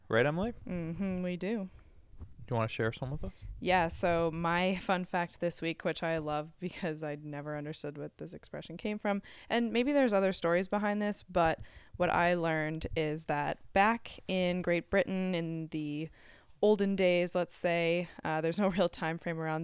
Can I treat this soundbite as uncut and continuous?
yes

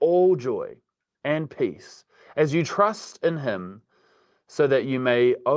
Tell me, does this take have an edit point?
no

